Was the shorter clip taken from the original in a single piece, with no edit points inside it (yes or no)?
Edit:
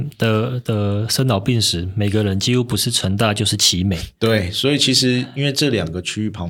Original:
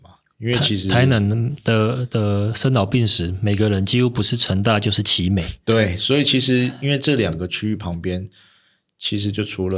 yes